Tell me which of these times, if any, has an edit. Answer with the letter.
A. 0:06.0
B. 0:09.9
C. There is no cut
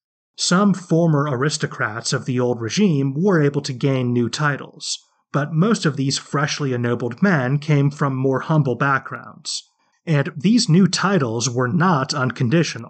B